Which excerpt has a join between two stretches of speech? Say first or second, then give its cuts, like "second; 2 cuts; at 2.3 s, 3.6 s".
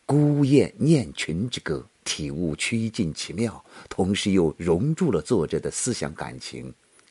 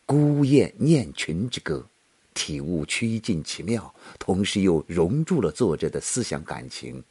first; 1 cut; at 1.9 s